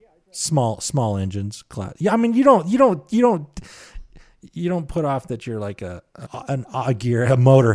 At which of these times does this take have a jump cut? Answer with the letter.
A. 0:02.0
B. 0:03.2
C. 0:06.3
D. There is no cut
C